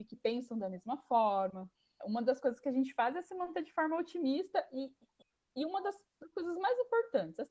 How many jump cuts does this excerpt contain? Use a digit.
1